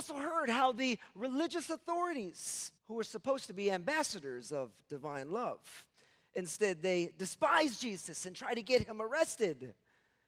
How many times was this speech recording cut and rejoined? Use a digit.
1